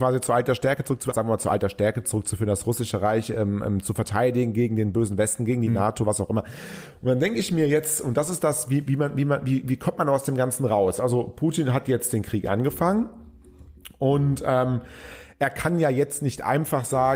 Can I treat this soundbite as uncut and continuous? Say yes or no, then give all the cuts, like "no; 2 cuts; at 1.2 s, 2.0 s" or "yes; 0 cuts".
no; 1 cut; at 1.1 s